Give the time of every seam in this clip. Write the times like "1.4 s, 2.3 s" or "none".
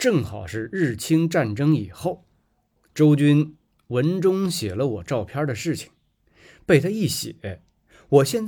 2.8 s